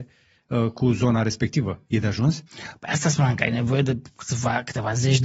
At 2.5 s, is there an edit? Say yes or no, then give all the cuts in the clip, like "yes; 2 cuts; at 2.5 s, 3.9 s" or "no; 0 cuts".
yes; 1 cut; at 2.5 s